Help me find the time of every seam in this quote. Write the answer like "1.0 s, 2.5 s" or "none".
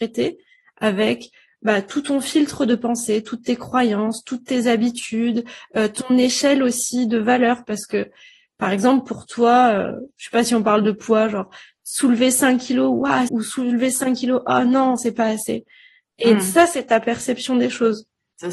13.3 s, 15.0 s